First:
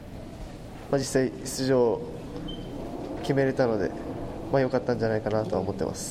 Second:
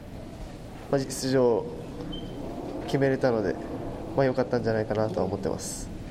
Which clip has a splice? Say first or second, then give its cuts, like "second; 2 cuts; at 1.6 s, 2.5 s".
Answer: second; 1 cut; at 1.0 s